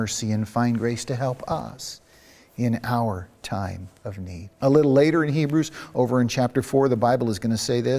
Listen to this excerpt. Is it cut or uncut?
cut